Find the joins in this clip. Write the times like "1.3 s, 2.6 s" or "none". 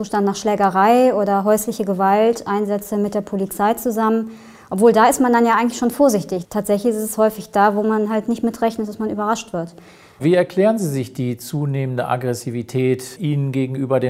6.4 s, 10.2 s, 13.2 s